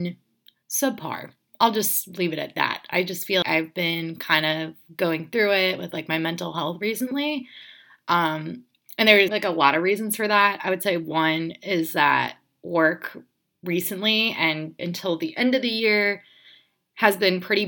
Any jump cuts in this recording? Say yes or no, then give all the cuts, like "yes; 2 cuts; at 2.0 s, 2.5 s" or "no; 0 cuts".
yes; 3 cuts; at 3.4 s, 9.3 s, 14.8 s